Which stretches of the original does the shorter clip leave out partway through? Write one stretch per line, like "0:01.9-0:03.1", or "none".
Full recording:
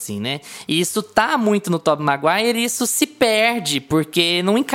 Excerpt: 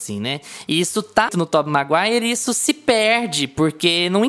0:01.3-0:01.6